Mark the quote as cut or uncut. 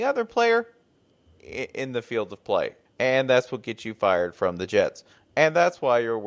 cut